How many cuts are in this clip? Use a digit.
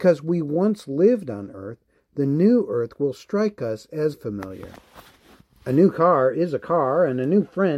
1